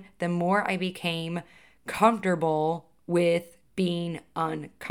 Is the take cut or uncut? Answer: uncut